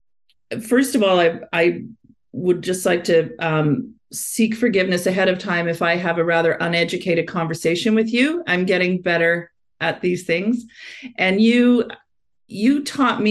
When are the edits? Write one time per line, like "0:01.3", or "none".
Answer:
none